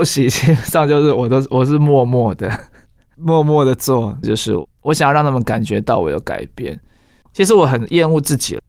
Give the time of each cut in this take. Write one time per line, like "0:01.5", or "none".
0:04.2
0:07.2